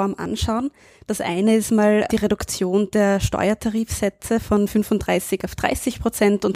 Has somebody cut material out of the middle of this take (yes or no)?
yes